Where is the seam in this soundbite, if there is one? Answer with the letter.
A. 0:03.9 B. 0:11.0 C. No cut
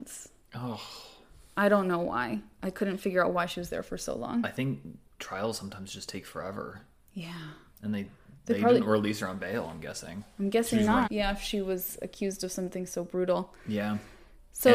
B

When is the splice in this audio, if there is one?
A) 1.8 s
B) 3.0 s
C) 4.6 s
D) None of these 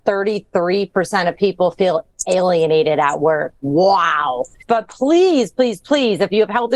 C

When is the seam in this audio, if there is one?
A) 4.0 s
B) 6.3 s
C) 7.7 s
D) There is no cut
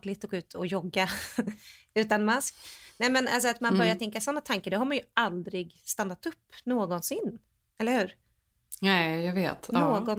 D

